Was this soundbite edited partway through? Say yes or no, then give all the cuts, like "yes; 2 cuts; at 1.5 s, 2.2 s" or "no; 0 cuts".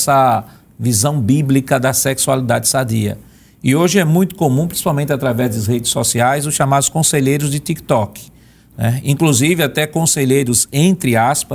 no; 0 cuts